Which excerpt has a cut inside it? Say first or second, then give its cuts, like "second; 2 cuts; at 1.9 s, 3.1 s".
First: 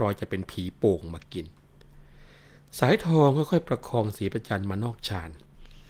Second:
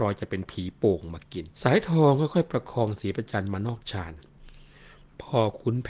second; 1 cut; at 1.5 s